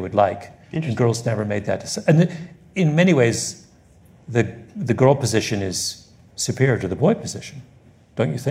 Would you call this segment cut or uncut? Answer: uncut